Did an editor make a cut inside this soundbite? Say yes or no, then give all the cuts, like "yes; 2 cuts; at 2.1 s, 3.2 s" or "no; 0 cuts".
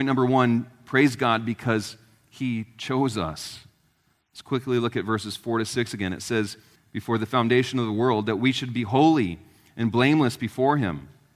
yes; 1 cut; at 6.8 s